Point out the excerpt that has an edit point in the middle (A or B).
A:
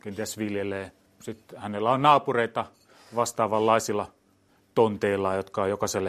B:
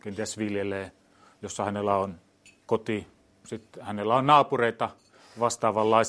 A